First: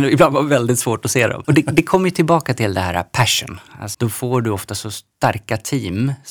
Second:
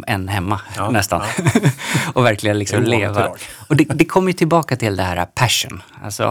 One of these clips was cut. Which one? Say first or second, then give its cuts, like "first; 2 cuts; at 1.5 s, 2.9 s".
first; 2 cuts; at 1.4 s, 3.9 s